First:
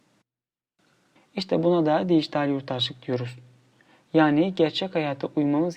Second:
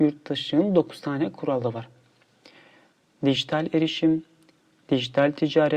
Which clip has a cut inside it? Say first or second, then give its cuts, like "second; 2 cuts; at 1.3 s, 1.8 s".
first; 1 cut; at 1.2 s